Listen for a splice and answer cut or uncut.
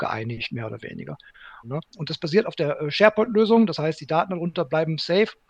cut